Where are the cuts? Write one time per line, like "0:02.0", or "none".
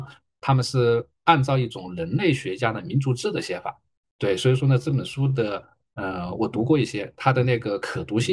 0:04.0
0:06.4